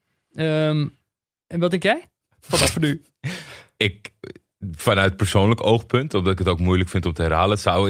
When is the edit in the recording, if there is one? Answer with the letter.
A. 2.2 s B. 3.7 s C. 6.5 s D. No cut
A